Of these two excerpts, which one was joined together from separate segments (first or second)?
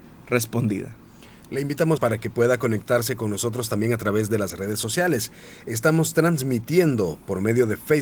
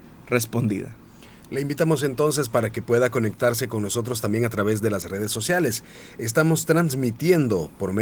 first